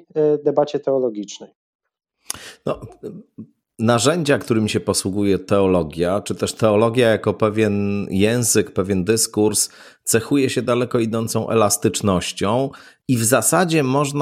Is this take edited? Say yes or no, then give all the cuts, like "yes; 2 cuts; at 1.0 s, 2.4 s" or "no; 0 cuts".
no; 0 cuts